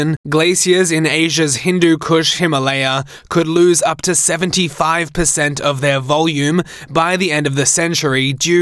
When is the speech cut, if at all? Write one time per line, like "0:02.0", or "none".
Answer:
none